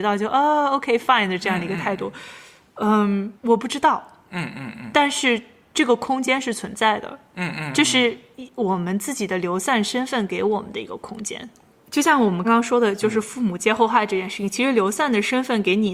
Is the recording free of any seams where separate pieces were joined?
no; 2 cuts; at 3.4 s, 12.4 s

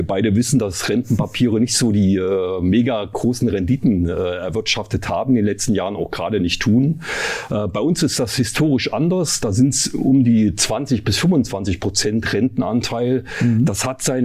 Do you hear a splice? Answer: no; 0 cuts

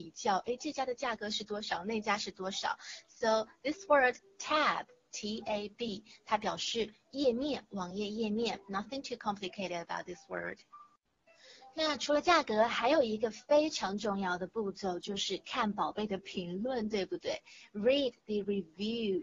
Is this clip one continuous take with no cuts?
yes; 0 cuts

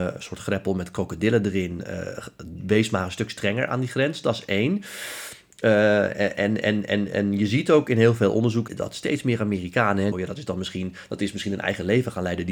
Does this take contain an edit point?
yes; 2 cuts; at 8.7 s, 10.1 s

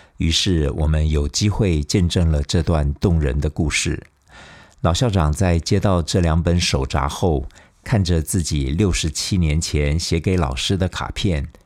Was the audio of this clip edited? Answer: no; 0 cuts

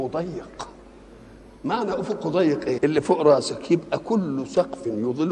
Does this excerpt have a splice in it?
yes; 1 cut; at 2.8 s

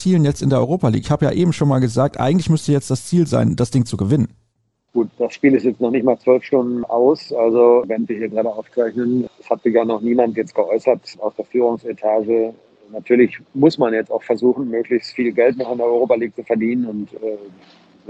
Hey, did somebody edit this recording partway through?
no; 0 cuts

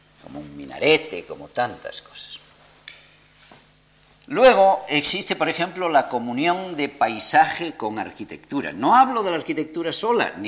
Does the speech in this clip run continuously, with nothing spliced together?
yes; 0 cuts

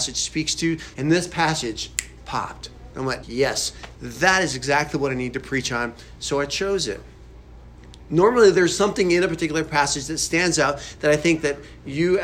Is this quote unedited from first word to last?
no; 2 cuts; at 0.9 s, 3.2 s

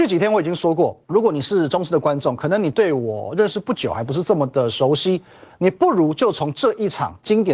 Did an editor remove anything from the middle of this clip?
yes; 1 cut; at 1.0 s

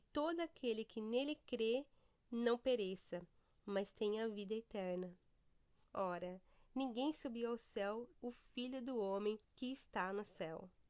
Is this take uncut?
no; 3 cuts; at 5.8 s, 8.1 s, 9.4 s

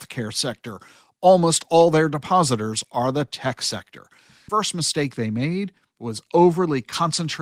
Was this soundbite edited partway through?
no; 0 cuts

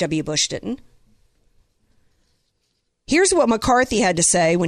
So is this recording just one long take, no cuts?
yes; 0 cuts

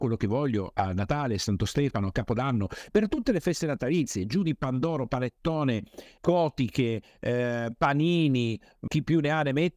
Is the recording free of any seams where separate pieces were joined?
no; 2 cuts; at 6.2 s, 8.9 s

